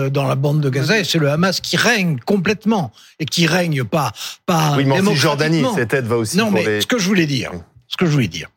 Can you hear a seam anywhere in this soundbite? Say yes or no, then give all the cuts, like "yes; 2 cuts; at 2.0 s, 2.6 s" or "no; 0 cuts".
no; 0 cuts